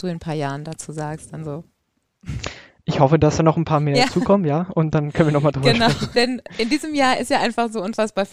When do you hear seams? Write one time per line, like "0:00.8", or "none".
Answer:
0:06.1